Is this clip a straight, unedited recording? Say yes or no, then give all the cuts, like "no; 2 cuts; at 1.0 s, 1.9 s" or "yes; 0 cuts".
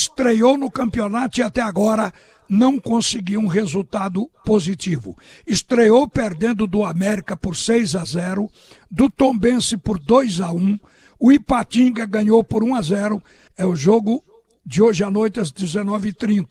no; 1 cut; at 13.5 s